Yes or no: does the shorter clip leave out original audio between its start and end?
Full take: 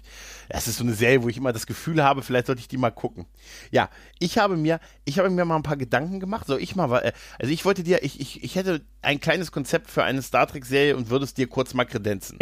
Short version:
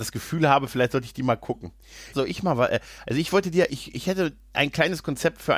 yes